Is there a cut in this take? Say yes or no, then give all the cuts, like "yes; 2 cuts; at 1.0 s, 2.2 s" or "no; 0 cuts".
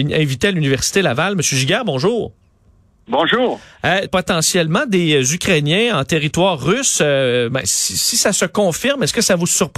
yes; 1 cut; at 4.1 s